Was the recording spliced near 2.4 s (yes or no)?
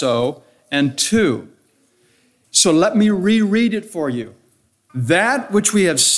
yes